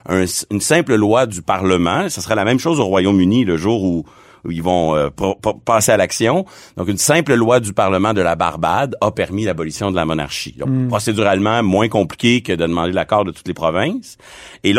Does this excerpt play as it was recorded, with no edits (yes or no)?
yes